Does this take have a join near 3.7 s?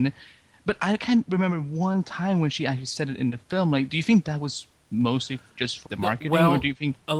no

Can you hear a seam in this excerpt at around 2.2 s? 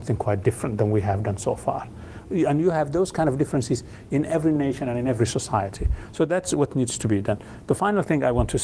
yes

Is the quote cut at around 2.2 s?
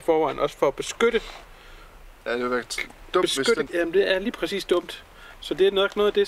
no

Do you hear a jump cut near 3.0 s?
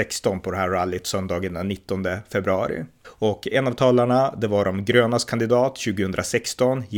yes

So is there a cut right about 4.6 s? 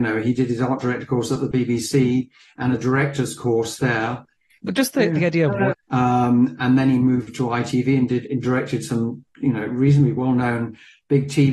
yes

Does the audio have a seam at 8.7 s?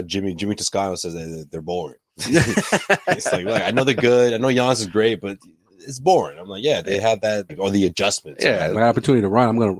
yes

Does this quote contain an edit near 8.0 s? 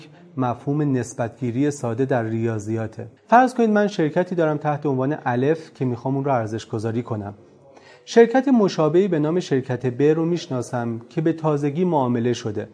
no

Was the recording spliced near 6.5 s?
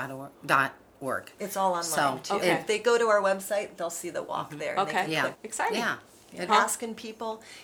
yes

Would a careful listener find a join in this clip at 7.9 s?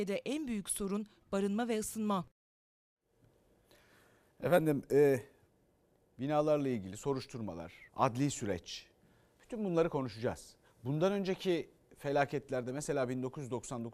yes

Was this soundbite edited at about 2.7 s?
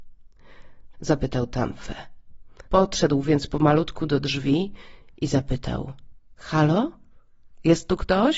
yes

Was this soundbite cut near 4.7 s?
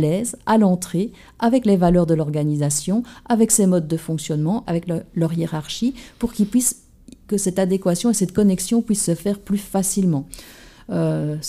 yes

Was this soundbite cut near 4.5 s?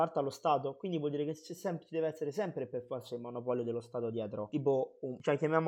no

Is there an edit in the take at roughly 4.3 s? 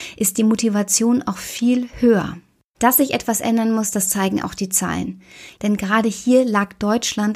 no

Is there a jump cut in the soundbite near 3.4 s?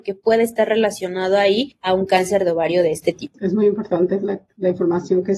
no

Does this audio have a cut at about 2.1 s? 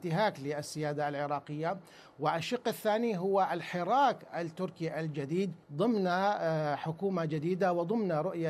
no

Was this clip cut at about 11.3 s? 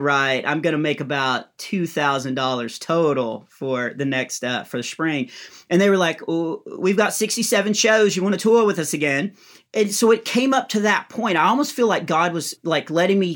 no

